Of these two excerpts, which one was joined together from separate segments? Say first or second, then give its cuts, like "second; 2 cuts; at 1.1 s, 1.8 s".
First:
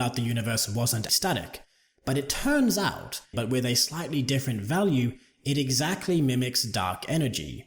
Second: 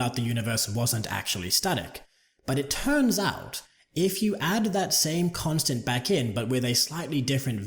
first; 2 cuts; at 1.1 s, 3.3 s